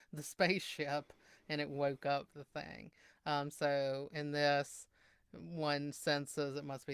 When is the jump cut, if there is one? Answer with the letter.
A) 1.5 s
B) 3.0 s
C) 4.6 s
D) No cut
D